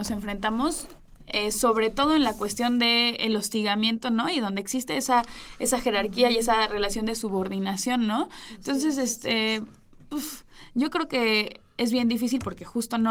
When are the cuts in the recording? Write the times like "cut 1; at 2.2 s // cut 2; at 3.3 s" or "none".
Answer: none